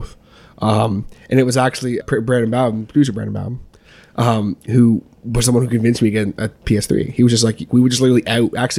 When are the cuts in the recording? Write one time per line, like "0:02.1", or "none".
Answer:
0:02.0
0:07.7